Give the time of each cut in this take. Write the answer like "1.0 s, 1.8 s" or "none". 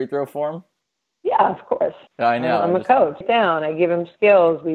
2.1 s, 3.2 s